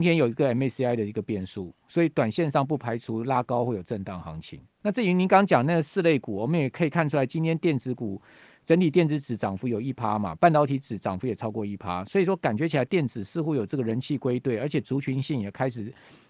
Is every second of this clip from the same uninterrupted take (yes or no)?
no